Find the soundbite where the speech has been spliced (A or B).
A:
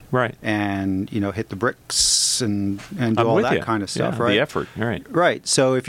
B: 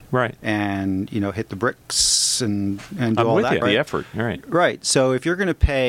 B